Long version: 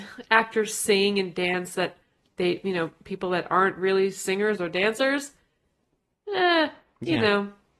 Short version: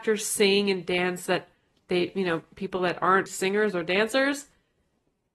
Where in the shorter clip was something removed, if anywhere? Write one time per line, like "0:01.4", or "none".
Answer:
0:03.3